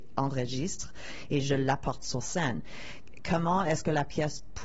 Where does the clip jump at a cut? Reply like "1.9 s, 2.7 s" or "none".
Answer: none